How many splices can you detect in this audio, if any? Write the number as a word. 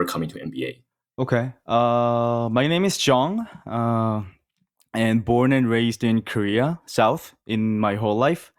zero